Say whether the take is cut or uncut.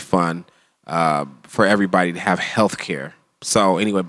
uncut